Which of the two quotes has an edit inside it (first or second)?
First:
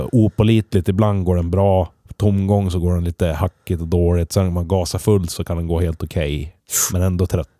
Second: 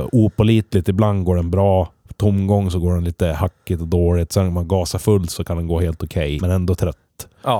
second